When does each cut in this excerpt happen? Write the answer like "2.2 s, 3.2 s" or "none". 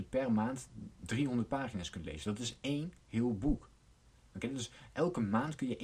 none